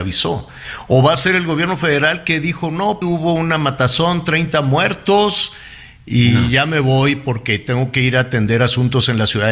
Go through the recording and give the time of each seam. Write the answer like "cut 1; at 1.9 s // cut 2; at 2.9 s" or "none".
cut 1; at 3.0 s